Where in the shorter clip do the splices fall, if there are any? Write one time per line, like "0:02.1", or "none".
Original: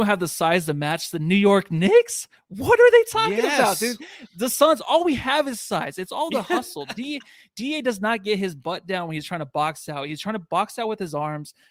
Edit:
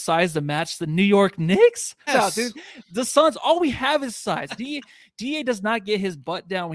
0:02.1
0:04.5